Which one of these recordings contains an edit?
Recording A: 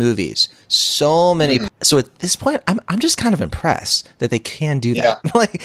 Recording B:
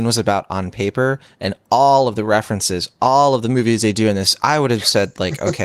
A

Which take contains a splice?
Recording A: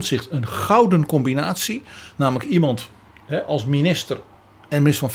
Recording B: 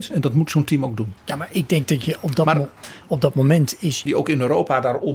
B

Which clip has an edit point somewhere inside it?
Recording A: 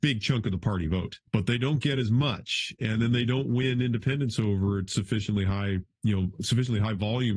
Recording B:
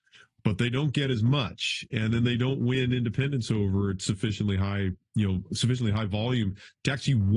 A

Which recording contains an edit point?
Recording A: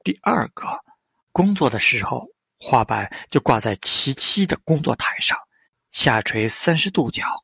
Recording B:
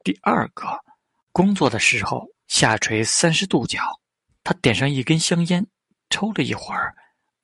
B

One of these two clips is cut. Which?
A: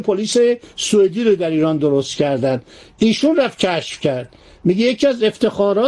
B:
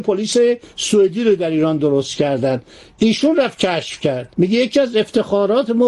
B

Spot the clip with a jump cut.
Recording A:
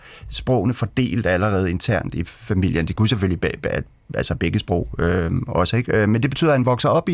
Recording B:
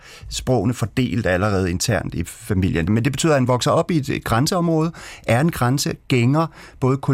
B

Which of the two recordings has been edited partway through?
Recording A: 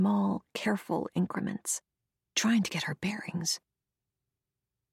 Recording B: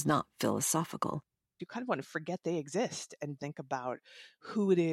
B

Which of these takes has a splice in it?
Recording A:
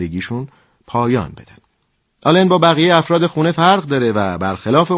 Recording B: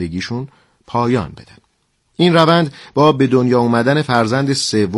A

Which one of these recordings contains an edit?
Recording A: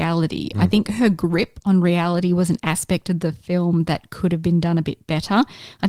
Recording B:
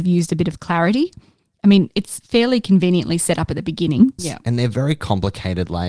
B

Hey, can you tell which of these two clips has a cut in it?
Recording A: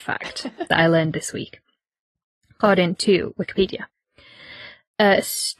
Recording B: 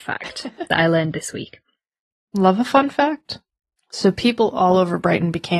B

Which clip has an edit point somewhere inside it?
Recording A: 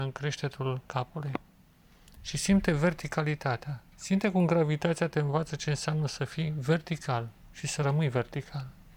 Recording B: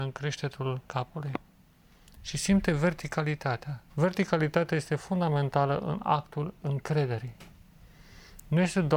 B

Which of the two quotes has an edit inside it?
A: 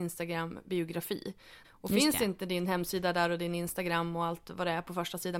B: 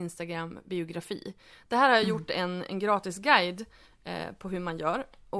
A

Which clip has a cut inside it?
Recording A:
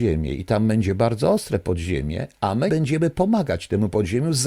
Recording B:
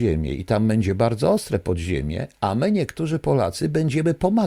A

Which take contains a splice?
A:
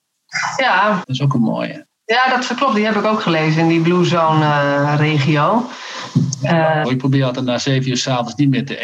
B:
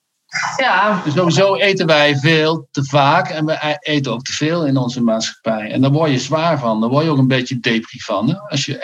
A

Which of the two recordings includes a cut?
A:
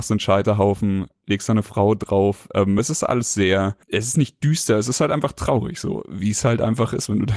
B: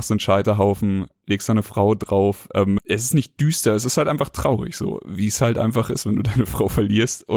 B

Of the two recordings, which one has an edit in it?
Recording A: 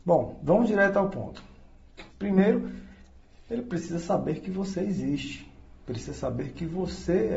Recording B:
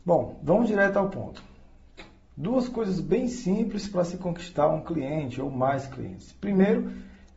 A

